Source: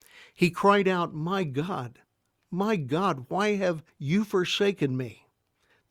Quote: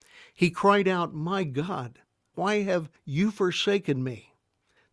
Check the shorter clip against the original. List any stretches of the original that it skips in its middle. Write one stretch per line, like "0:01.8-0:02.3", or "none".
0:02.3-0:03.3